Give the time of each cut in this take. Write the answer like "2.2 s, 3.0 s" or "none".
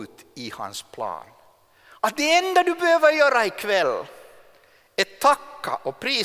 none